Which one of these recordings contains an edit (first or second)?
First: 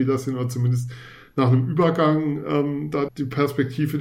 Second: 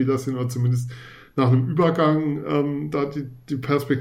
first